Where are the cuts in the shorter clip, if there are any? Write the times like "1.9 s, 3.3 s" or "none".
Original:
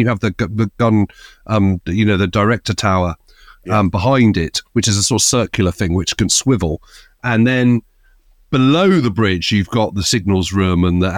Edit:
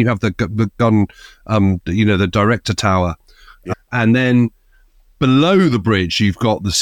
3.7 s